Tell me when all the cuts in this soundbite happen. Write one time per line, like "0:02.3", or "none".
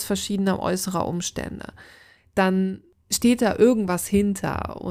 0:02.2